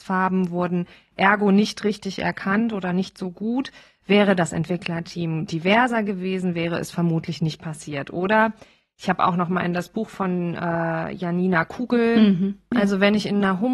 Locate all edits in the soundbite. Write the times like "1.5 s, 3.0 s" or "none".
12.7 s